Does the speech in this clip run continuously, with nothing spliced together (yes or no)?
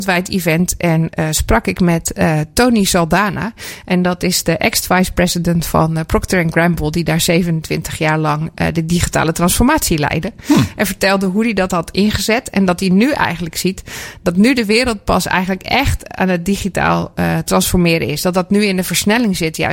yes